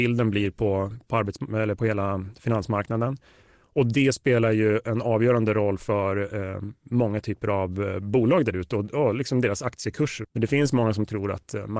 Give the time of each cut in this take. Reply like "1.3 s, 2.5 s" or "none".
1.8 s, 10.2 s